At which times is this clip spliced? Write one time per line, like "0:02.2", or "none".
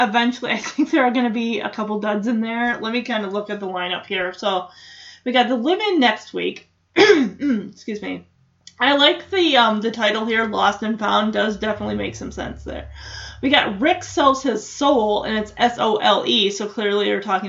none